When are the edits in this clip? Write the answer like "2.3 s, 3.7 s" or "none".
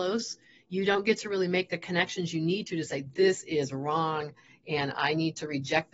none